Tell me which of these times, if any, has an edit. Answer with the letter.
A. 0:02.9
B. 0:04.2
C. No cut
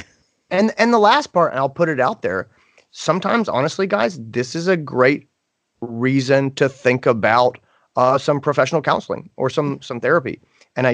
C